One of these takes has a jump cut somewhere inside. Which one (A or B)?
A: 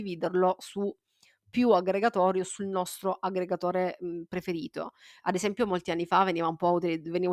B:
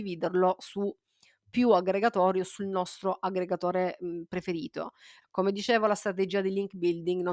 B